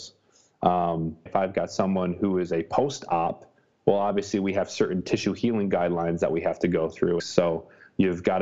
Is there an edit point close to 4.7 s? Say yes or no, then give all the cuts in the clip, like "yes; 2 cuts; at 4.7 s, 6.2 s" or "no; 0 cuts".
no; 2 cuts; at 1.3 s, 7.2 s